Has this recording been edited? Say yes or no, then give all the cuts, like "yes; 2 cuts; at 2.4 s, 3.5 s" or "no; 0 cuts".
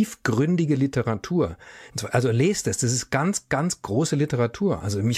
yes; 1 cut; at 1.9 s